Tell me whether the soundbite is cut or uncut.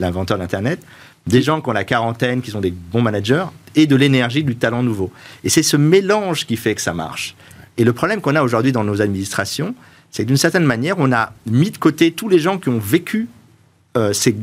uncut